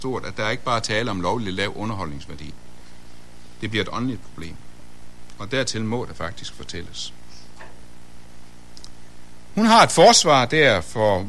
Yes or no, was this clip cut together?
yes